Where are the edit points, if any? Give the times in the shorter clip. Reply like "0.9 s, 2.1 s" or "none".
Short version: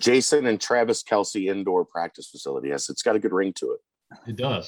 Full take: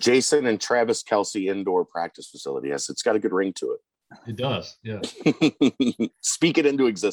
none